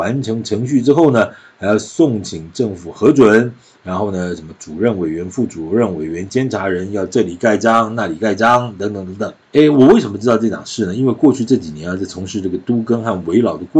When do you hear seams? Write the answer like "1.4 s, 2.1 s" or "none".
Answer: 9.4 s